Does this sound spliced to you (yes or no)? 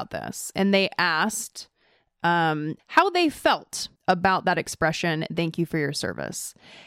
yes